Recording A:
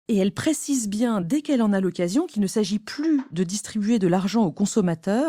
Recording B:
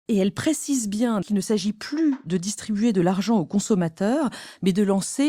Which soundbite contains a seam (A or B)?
B